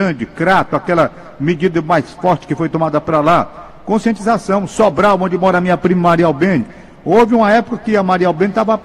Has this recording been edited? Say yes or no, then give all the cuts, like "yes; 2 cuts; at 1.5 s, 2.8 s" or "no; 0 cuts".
no; 0 cuts